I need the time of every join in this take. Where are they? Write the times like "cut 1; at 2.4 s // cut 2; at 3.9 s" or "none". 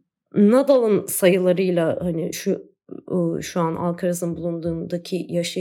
none